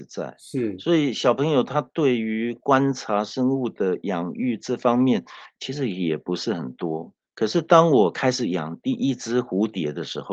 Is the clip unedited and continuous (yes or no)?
yes